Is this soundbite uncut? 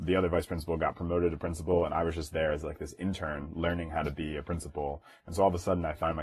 yes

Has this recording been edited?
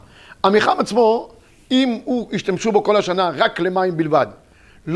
no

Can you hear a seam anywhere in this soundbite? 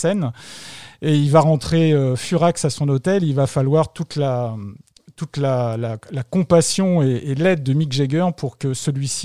no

